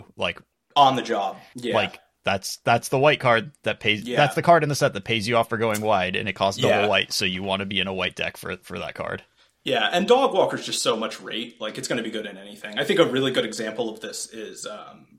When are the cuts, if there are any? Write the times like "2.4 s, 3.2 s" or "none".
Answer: 1.5 s